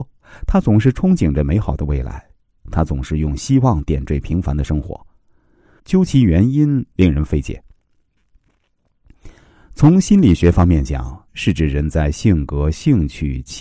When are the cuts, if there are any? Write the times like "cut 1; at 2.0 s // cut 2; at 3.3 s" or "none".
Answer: cut 1; at 5.8 s // cut 2; at 11.3 s